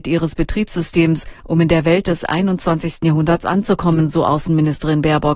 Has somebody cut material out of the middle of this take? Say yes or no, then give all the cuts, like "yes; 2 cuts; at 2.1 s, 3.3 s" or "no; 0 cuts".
no; 0 cuts